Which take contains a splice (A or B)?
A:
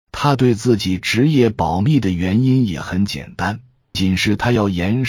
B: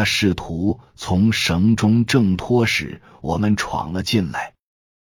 A